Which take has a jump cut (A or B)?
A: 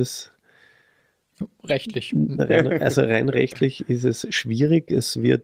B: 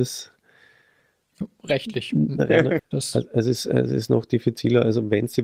B